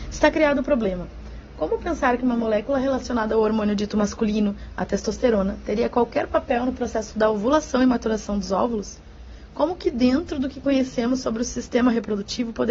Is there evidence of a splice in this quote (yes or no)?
no